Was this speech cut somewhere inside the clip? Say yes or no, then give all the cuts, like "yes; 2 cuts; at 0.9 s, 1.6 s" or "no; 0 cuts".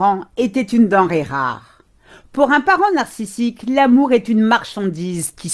no; 0 cuts